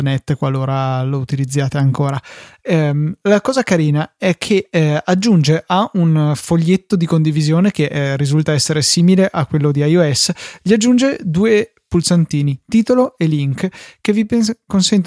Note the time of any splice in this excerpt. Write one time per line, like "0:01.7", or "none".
none

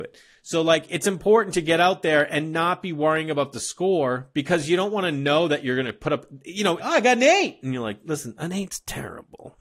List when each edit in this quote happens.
0:06.8

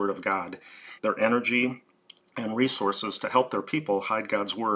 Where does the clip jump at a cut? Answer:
0:01.0

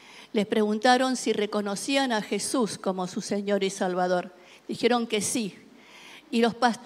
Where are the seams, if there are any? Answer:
none

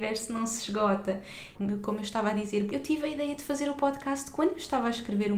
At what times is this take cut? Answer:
0:01.5
0:02.7

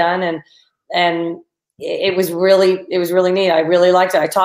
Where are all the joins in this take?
none

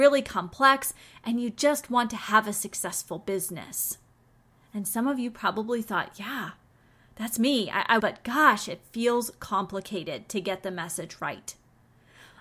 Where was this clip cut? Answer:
0:08.0

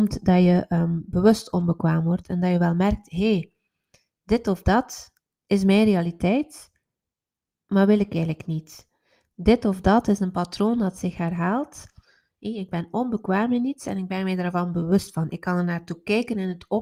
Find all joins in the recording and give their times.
none

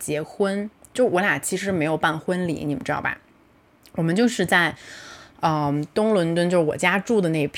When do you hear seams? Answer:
none

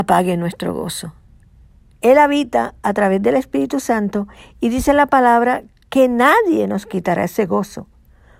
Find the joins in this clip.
0:01.9

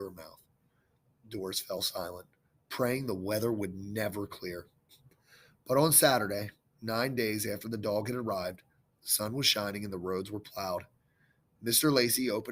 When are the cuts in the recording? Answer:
none

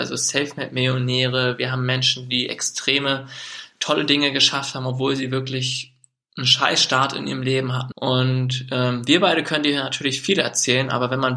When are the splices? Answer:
0:07.9

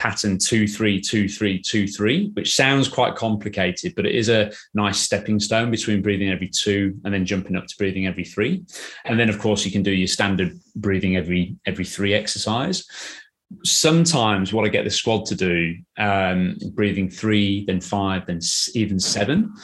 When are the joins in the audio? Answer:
0:09.0
0:16.6

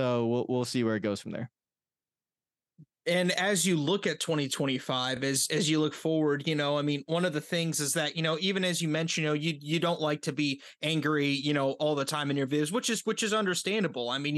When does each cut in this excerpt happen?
none

